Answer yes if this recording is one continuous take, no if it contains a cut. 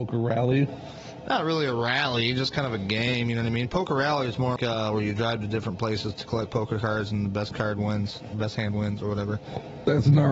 no